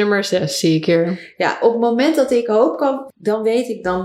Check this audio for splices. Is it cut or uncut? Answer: cut